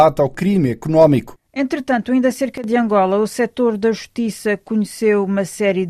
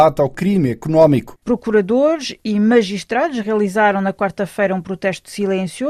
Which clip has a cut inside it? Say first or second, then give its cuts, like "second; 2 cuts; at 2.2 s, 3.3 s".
second; 1 cut; at 1.4 s